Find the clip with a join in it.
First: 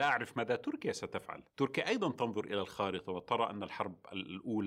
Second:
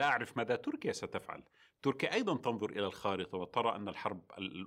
first; 1 cut; at 1.5 s

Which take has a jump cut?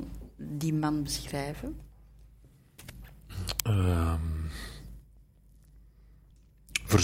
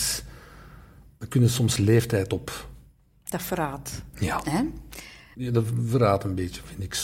second; 2 cuts; at 4.1 s, 5.3 s

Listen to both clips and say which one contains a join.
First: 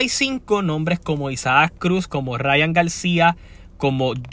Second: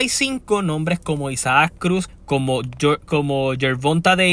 second; 1 cut; at 2.1 s

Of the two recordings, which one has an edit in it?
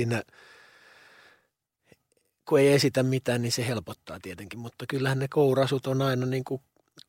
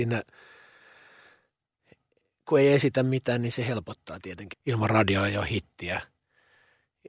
second; 1 cut; at 4.5 s

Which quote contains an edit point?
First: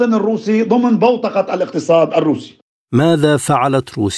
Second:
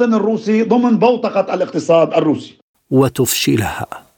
second; 1 cut; at 2.7 s

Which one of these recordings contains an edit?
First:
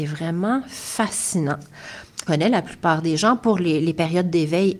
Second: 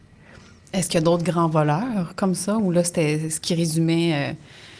first; 1 cut; at 2.3 s

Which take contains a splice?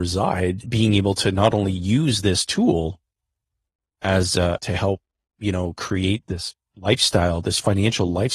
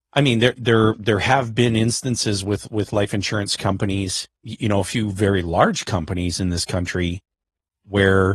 first; 2 cuts; at 4.6 s, 6.2 s

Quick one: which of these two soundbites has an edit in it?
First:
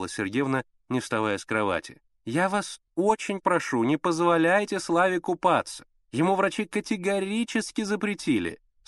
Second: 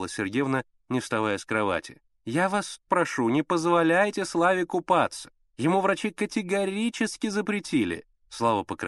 second; 1 cut; at 2.9 s

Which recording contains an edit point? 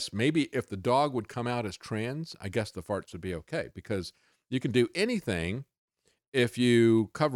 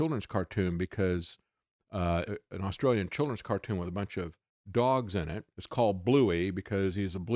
second; 2 cuts; at 2.3 s, 5.5 s

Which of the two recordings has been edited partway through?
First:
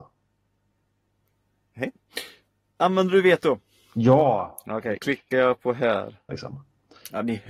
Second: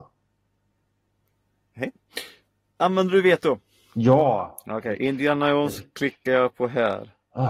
first; 2 cuts; at 5.0 s, 6.3 s

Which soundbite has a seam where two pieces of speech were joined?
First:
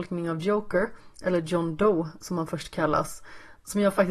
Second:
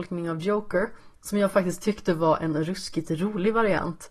second; 1 cut; at 1.1 s

